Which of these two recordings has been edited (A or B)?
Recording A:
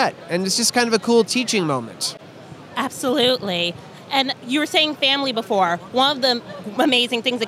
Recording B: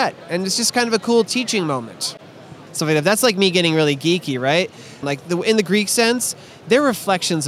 B